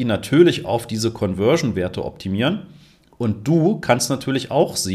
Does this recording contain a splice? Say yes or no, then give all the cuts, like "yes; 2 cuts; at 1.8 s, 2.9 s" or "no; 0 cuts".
no; 0 cuts